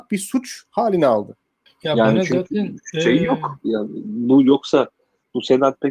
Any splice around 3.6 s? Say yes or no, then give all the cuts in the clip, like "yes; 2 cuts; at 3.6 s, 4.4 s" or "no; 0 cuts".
no; 1 cut; at 1.7 s